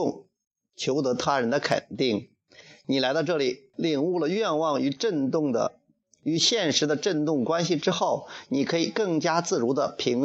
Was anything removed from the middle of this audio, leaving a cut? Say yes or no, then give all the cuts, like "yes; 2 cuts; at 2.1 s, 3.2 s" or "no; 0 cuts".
yes; 1 cut; at 3.7 s